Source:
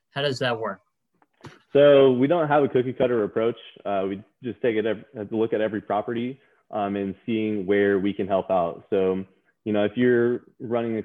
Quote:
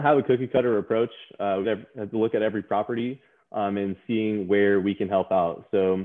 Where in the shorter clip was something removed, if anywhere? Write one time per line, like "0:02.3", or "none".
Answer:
0:01.6